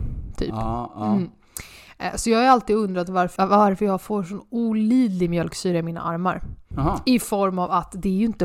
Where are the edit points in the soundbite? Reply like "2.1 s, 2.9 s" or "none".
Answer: 3.4 s, 6.7 s